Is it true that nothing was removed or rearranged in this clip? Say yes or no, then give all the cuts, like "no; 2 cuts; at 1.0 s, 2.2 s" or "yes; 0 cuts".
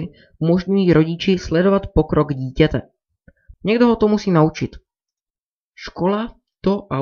no; 1 cut; at 3.5 s